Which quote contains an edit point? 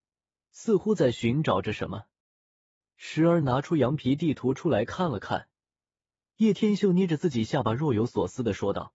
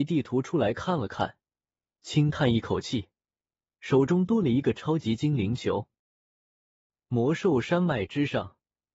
second; 1 cut; at 1.8 s

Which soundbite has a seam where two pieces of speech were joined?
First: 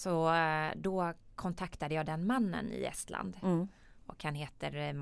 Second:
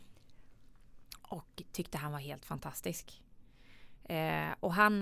first; 1 cut; at 2.1 s

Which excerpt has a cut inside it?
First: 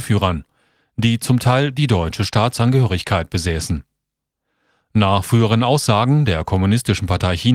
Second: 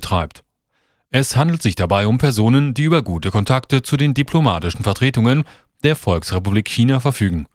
second; 1 cut; at 1.0 s

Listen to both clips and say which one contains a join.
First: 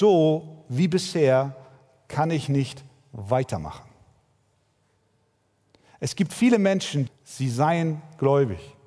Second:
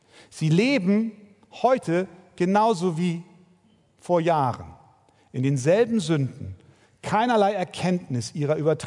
first; 1 cut; at 7.1 s

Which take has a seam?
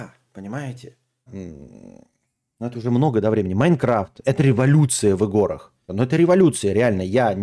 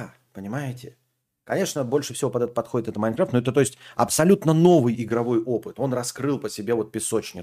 first; 3 cuts; at 1.3 s, 4.2 s, 5.9 s

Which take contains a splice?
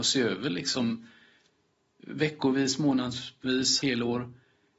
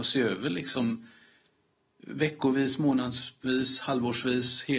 first; 1 cut; at 3.8 s

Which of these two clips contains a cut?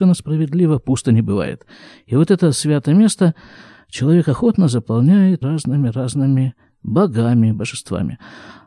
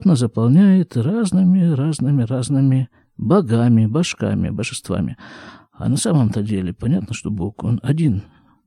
first; 2 cuts; at 5.4 s, 7.5 s

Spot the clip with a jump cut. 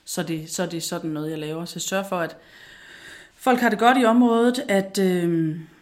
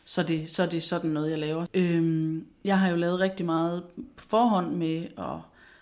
second; 1 cut; at 1.7 s

